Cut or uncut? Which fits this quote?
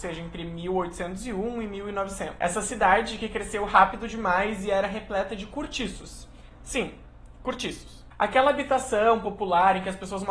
uncut